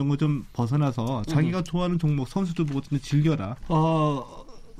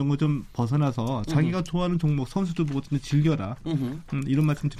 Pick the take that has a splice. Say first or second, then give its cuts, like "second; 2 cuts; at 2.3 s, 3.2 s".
first; 1 cut; at 3.6 s